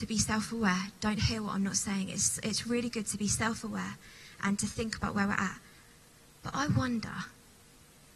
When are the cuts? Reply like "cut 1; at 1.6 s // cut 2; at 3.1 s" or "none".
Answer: none